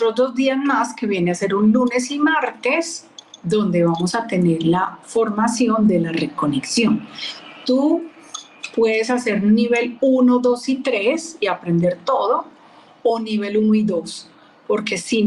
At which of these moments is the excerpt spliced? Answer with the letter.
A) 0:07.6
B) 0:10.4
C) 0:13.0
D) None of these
D